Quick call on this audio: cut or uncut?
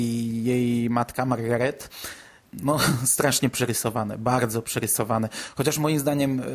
uncut